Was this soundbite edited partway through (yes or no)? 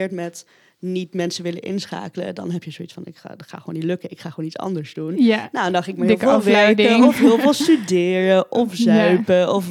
no